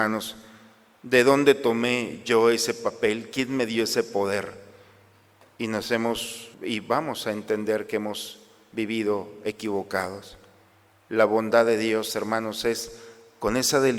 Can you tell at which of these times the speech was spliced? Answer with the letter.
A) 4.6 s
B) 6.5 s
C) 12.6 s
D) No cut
B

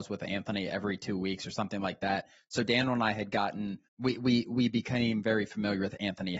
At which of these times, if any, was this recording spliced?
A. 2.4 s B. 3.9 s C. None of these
B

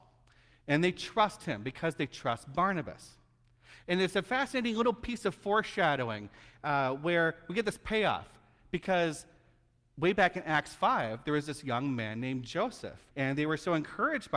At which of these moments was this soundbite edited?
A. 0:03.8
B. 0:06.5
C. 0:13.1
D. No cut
C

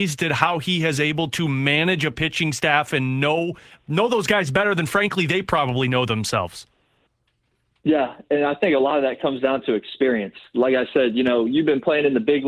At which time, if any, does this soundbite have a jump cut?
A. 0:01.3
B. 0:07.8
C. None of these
A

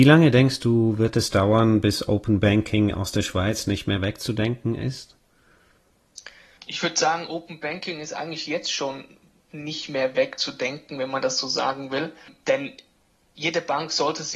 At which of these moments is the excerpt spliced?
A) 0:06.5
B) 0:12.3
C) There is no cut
C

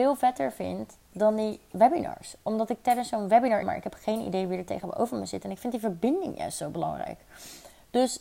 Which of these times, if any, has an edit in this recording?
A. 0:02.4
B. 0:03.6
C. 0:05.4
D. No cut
B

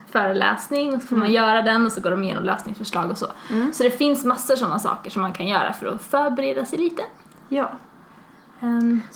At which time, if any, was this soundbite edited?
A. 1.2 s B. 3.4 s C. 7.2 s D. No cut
D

